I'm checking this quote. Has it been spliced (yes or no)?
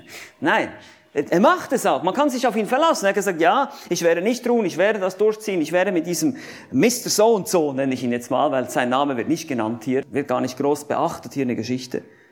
yes